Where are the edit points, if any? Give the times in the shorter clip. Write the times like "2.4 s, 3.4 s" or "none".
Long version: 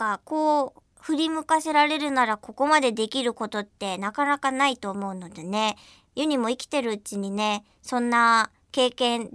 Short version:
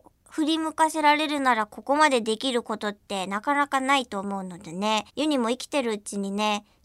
5.1 s